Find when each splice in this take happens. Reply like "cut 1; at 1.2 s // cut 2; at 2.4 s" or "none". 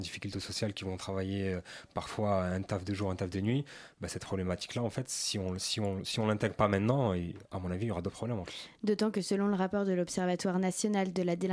none